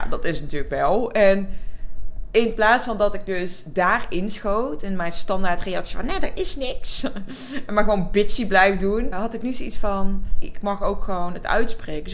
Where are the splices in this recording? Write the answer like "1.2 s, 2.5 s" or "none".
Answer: 9.1 s, 10.4 s